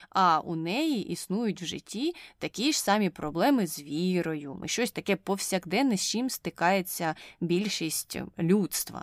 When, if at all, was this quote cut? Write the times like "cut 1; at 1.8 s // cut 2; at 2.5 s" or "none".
cut 1; at 4.6 s